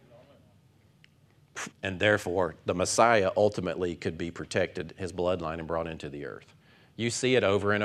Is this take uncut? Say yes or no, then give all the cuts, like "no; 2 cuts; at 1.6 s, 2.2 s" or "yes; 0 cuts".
no; 1 cut; at 1.7 s